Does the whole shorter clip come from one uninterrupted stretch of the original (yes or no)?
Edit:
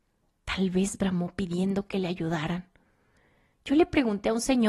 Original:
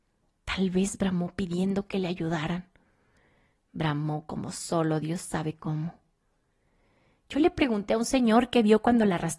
no